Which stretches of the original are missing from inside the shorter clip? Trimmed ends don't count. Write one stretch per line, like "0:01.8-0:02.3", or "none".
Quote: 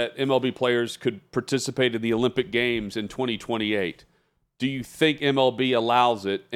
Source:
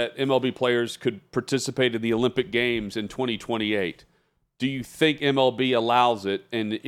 none